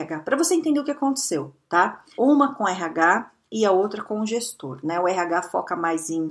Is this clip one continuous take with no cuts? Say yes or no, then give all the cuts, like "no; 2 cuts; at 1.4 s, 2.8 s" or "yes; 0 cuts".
no; 1 cut; at 2.2 s